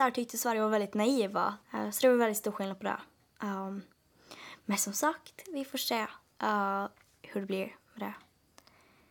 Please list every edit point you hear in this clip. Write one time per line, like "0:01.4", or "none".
0:01.6